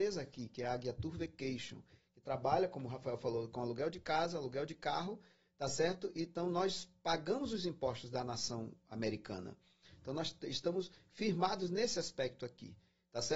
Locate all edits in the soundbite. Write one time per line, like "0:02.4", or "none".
none